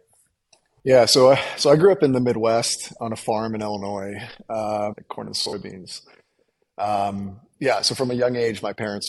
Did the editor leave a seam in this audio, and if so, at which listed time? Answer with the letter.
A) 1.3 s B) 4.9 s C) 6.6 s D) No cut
B